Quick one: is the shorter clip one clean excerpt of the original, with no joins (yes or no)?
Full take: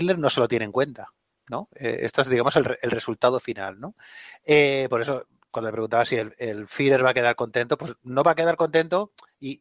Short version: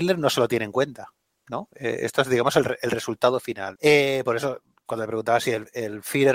no